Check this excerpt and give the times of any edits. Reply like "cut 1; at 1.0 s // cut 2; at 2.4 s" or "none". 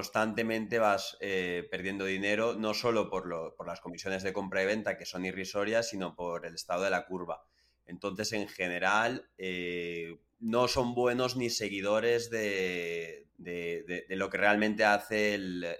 cut 1; at 10.3 s // cut 2; at 13.3 s